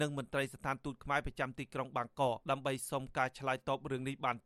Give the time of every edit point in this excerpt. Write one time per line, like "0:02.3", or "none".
0:02.4